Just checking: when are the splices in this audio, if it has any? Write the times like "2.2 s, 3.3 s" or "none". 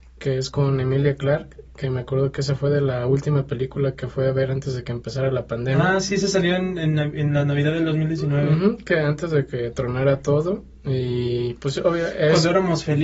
none